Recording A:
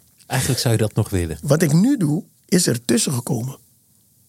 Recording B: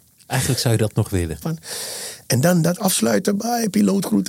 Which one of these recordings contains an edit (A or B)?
B